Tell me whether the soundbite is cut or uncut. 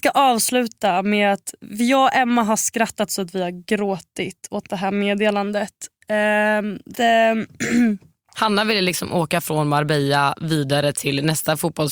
cut